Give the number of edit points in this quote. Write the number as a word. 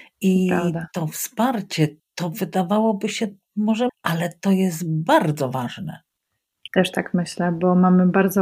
three